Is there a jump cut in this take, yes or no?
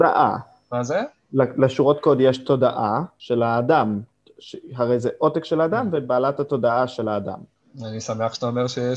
no